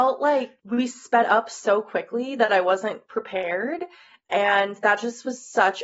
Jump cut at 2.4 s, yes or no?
no